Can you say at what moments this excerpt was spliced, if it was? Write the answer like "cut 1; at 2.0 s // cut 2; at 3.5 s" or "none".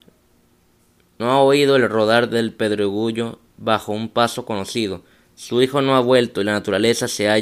none